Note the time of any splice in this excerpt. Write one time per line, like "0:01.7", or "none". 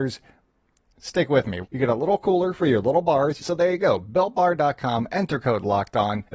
0:01.6
0:03.4